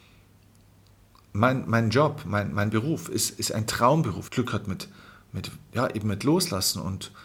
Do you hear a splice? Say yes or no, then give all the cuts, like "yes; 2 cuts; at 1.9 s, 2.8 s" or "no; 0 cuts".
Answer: yes; 2 cuts; at 4.3 s, 5.7 s